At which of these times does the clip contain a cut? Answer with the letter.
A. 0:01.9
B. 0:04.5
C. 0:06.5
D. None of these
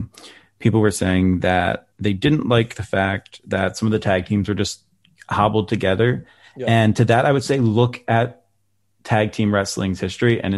A